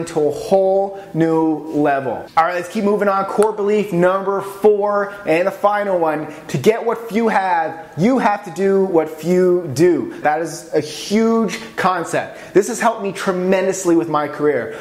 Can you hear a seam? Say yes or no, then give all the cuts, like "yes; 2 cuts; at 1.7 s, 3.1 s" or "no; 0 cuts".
yes; 1 cut; at 10.2 s